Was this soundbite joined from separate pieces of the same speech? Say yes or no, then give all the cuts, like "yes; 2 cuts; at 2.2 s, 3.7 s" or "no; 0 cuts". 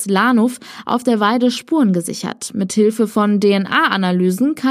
no; 0 cuts